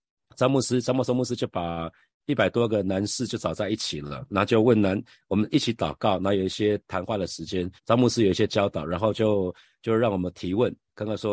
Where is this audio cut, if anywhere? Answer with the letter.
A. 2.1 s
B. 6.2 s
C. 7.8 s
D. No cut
C